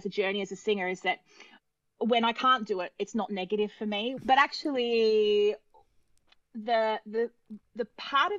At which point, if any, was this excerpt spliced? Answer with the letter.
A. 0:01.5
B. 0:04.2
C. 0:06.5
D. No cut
B